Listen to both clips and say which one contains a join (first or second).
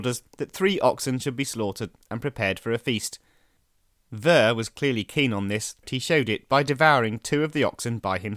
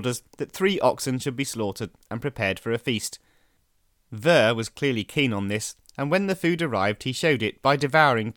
first